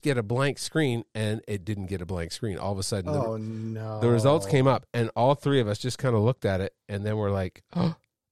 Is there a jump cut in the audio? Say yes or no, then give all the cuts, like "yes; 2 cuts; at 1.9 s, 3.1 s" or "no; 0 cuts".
no; 0 cuts